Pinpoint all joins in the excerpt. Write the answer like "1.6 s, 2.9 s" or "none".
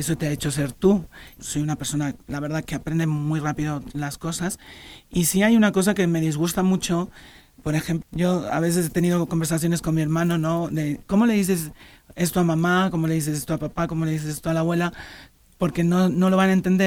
1.4 s, 8.0 s